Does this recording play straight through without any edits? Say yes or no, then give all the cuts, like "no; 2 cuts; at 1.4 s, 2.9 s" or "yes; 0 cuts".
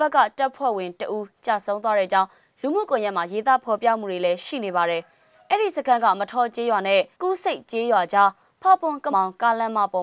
no; 2 cuts; at 7.1 s, 9.1 s